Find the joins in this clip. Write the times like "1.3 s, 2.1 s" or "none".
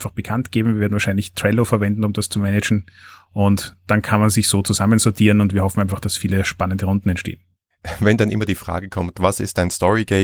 none